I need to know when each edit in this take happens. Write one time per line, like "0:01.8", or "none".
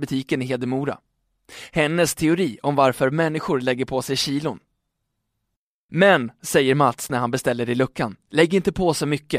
0:05.9